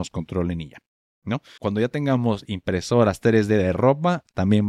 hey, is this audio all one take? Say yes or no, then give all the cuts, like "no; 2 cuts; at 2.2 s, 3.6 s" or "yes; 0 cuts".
no; 1 cut; at 1.6 s